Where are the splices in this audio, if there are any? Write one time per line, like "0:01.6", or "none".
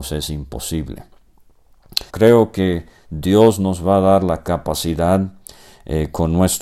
0:02.1